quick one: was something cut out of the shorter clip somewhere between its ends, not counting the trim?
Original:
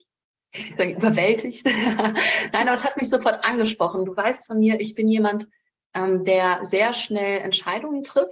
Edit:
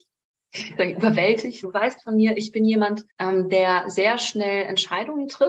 yes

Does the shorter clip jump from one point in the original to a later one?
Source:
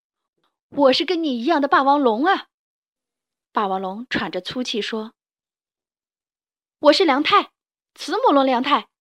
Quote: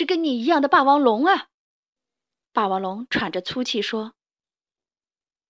no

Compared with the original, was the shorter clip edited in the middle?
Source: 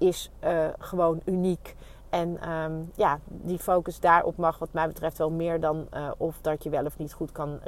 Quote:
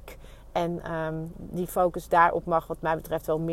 yes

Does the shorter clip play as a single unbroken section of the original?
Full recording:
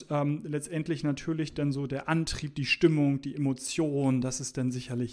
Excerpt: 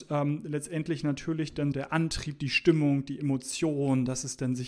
no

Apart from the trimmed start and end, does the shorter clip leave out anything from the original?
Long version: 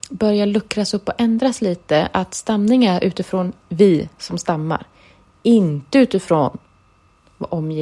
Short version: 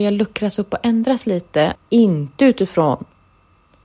yes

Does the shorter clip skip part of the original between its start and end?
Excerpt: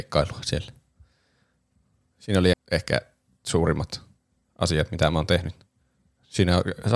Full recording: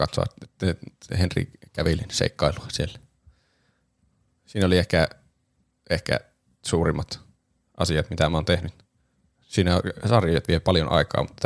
yes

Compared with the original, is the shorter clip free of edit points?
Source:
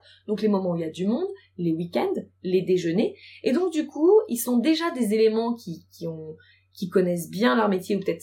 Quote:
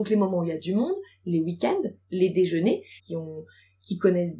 no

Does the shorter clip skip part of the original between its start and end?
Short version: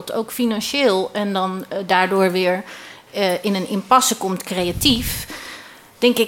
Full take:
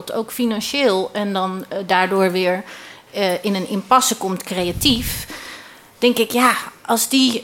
no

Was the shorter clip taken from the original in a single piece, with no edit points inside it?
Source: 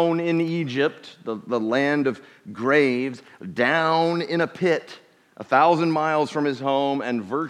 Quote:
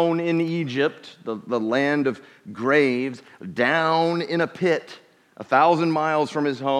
yes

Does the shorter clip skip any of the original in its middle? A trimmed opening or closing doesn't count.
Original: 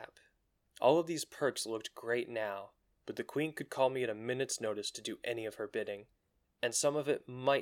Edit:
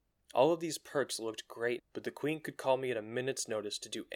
yes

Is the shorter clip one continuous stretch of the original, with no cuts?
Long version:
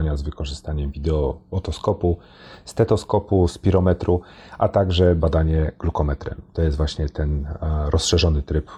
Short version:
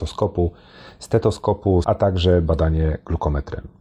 no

